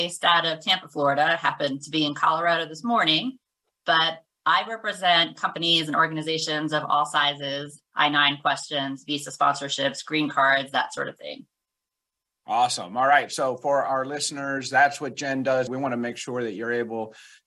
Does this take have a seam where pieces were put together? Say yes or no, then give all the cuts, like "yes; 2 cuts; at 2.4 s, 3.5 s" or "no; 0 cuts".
yes; 2 cuts; at 7.8 s, 15.7 s